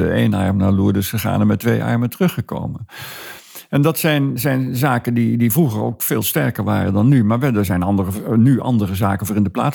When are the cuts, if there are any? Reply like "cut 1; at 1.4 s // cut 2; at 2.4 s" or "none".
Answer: none